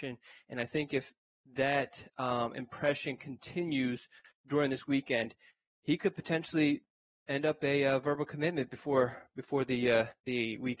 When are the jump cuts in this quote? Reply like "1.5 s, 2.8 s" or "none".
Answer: none